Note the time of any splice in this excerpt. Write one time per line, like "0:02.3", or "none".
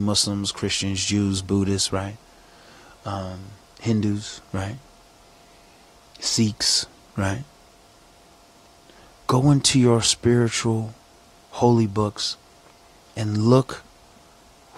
none